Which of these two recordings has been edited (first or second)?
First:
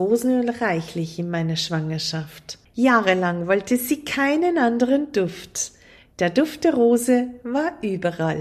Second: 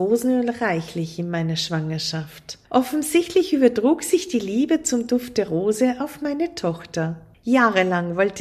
first